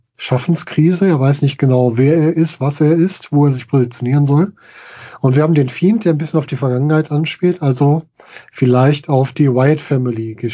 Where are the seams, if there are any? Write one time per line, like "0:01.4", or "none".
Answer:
none